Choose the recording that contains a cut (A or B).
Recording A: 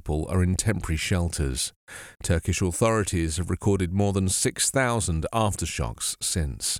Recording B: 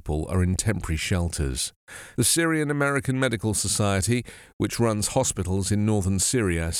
B